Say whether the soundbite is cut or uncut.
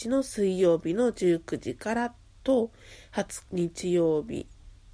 cut